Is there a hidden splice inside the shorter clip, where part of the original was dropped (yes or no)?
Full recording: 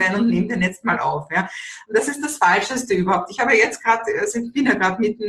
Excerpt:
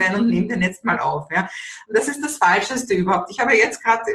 no